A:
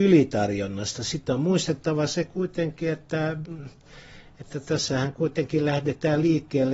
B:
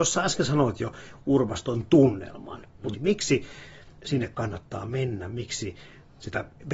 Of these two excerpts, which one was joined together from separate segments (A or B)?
B